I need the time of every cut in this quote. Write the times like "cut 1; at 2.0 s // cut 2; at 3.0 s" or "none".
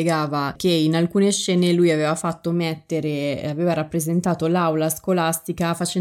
none